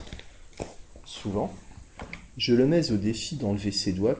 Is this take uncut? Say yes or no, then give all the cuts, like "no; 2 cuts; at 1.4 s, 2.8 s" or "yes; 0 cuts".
yes; 0 cuts